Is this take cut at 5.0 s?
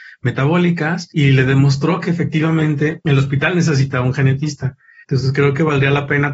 yes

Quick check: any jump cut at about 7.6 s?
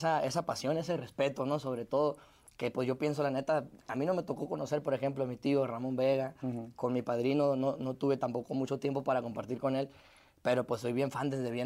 no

